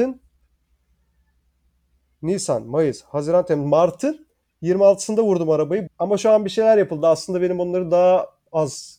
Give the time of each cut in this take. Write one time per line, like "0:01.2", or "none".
0:05.9